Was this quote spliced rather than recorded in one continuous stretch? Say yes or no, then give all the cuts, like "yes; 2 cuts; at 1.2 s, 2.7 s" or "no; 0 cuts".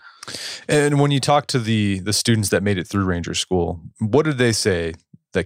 no; 0 cuts